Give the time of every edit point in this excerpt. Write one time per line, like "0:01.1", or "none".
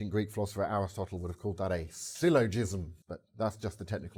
0:03.0